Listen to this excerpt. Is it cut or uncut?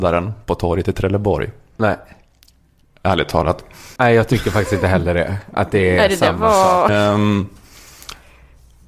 cut